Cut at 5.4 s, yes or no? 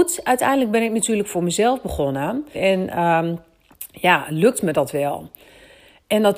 no